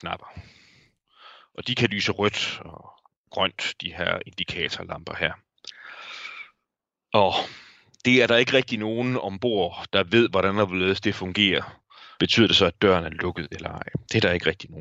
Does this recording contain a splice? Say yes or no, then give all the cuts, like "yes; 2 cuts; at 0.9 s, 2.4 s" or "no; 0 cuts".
yes; 1 cut; at 12.2 s